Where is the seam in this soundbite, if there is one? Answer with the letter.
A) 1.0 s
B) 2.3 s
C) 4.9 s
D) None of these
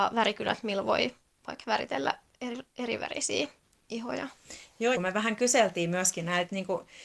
C